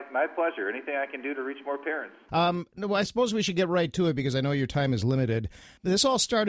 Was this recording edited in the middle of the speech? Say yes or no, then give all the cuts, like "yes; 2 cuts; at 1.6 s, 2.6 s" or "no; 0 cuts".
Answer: yes; 1 cut; at 2.3 s